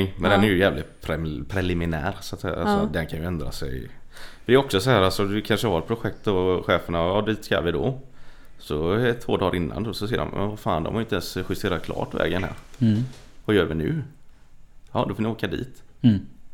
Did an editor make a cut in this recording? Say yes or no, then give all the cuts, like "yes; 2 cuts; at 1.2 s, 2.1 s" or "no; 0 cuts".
no; 0 cuts